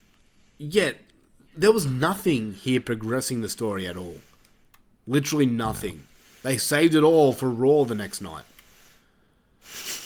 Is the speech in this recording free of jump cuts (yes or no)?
yes